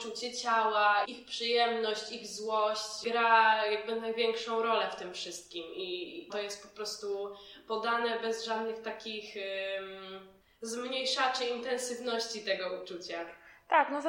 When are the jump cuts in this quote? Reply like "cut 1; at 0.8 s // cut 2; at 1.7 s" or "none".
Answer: cut 1; at 1.0 s // cut 2; at 6.3 s